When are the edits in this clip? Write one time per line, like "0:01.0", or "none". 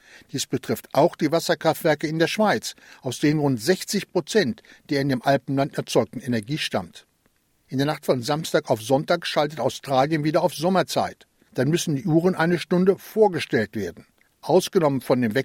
none